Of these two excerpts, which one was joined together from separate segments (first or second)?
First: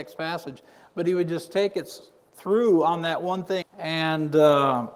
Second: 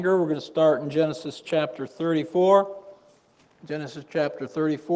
first